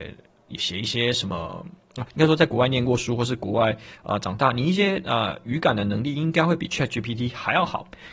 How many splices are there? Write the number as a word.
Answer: zero